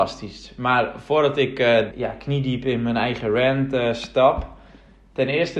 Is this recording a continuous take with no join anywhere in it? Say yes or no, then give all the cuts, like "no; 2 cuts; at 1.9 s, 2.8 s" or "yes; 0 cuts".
no; 1 cut; at 1.9 s